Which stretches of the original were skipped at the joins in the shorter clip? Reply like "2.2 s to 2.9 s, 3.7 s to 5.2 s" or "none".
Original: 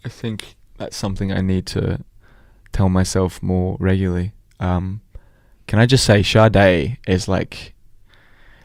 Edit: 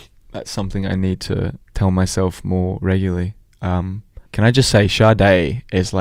2.1 s to 2.7 s, 5.2 s to 5.6 s